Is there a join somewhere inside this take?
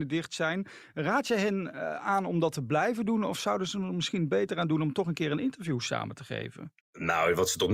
yes; 1 cut; at 6.8 s

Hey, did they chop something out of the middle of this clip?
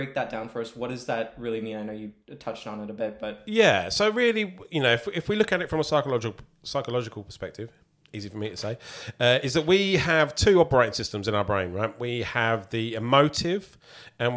no; 0 cuts

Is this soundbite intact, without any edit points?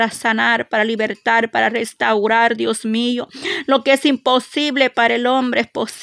yes; 0 cuts

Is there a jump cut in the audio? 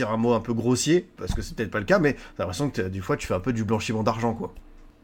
no; 0 cuts

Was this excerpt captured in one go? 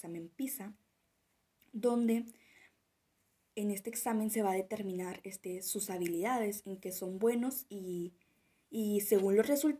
yes; 0 cuts

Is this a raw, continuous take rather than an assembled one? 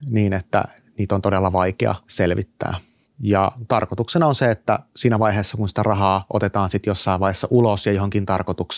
no; 1 cut; at 3.1 s

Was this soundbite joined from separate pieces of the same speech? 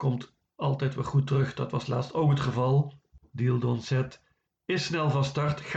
no; 0 cuts

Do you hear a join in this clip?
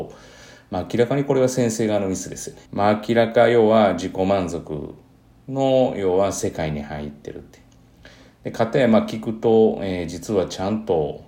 yes; 1 cut; at 2.7 s

